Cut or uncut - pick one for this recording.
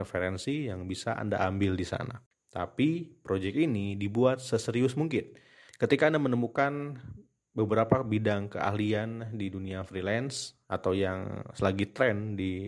cut